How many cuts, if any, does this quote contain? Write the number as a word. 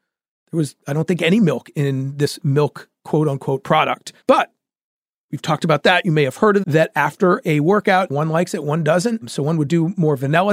two